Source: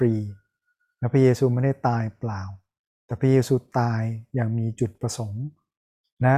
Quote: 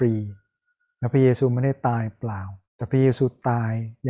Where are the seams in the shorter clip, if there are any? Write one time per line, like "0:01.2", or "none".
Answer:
0:02.6